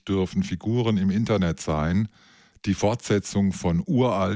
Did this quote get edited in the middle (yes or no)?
no